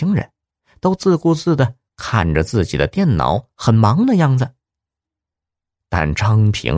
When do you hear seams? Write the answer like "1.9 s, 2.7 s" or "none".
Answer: none